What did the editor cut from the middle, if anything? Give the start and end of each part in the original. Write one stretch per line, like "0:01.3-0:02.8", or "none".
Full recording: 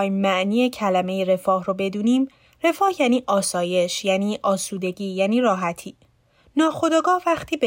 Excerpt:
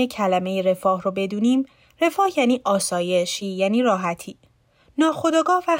0:04.0-0:05.0